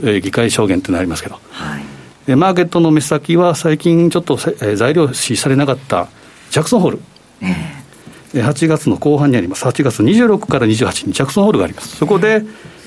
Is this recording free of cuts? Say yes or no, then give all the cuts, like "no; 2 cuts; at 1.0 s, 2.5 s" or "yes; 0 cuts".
yes; 0 cuts